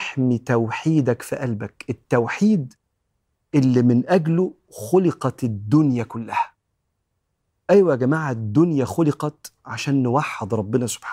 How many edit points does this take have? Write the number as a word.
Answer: zero